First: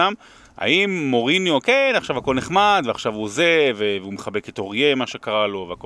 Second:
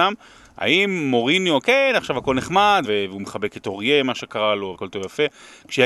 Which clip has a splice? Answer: second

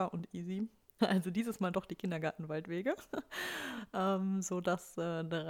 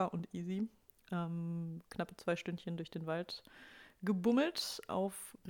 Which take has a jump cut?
first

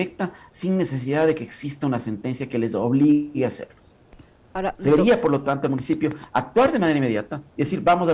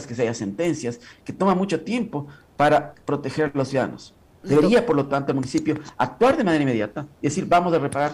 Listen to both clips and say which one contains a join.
second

